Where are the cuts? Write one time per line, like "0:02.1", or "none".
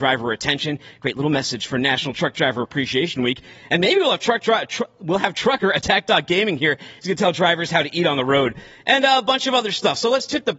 none